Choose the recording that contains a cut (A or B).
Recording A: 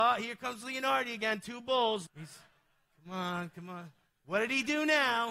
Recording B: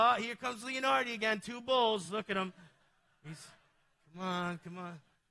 A